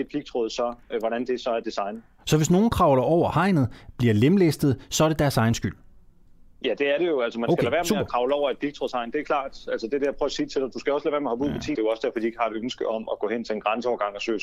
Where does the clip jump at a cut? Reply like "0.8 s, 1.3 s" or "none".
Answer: 11.7 s